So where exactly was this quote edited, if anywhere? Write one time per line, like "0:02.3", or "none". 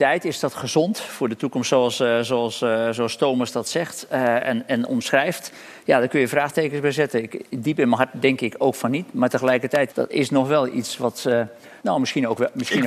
0:09.9
0:11.8